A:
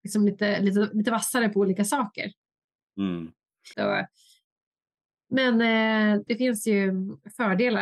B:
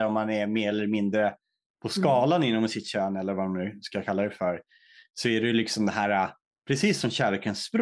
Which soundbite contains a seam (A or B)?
A